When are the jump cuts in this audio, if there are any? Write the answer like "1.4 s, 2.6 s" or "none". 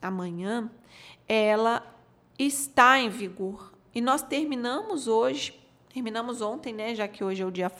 none